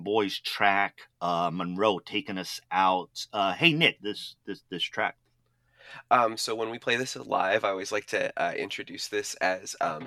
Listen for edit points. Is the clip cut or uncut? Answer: cut